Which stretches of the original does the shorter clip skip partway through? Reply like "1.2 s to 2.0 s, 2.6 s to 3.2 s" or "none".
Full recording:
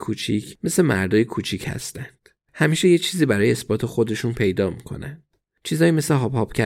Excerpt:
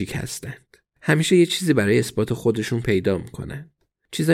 none